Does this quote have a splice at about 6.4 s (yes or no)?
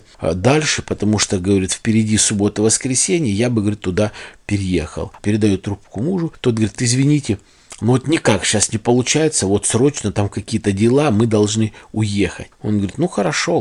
no